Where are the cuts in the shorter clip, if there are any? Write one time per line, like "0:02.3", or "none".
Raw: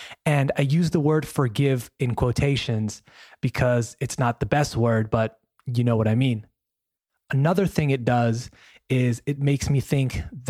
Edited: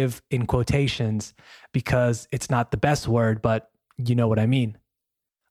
none